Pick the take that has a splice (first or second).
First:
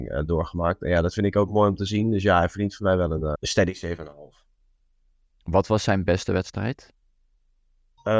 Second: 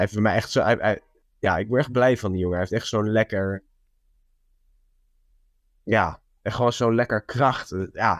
first